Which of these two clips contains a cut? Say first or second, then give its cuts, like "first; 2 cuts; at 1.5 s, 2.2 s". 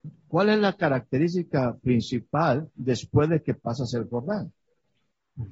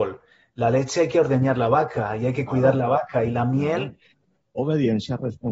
second; 1 cut; at 4.5 s